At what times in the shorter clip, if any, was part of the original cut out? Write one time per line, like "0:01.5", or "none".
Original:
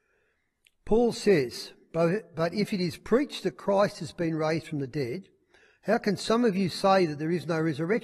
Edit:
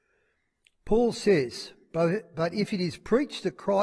none